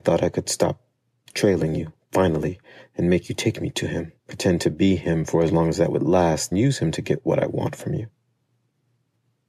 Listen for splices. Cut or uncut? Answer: cut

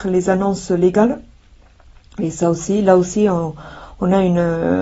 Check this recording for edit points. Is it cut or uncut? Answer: uncut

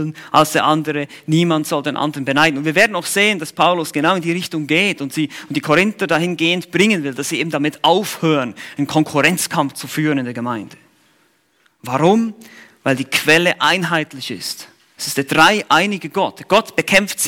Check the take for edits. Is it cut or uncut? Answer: uncut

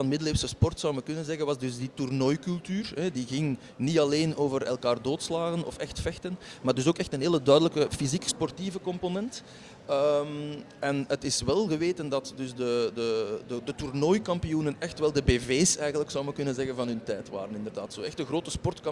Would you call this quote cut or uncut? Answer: uncut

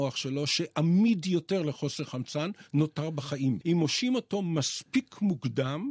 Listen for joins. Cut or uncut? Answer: cut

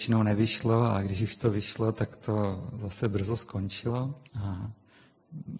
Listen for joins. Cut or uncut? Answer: cut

